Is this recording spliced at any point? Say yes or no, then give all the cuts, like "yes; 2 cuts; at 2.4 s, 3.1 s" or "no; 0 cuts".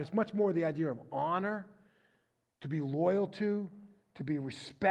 no; 0 cuts